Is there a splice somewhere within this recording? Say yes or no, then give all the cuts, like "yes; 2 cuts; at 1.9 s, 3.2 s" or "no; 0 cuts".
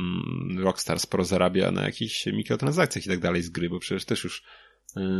no; 0 cuts